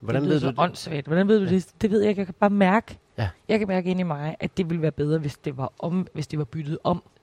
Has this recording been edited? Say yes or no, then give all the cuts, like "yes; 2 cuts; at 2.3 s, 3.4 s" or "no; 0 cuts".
no; 0 cuts